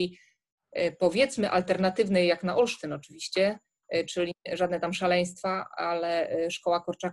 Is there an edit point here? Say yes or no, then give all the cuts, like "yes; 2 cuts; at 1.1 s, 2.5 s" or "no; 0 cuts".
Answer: no; 0 cuts